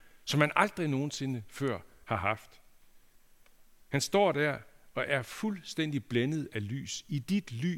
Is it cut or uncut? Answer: uncut